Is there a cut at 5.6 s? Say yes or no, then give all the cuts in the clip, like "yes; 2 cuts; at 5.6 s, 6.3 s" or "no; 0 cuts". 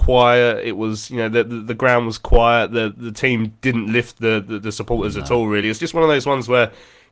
no; 0 cuts